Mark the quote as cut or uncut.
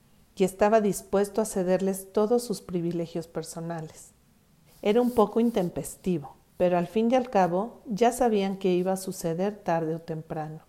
cut